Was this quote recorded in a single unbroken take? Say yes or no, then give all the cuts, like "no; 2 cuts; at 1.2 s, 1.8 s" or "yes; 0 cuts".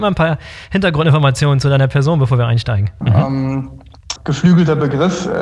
no; 2 cuts; at 3.0 s, 4.2 s